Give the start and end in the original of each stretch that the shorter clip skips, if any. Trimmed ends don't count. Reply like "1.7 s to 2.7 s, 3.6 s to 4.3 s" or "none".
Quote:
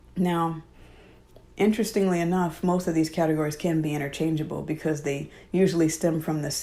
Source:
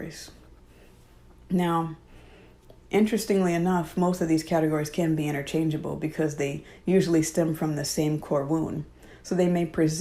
none